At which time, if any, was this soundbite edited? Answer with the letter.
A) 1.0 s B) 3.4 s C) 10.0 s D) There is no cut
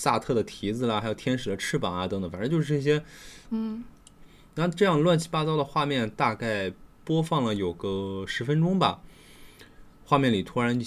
B